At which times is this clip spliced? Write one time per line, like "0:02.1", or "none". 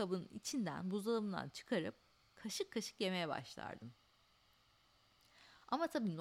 none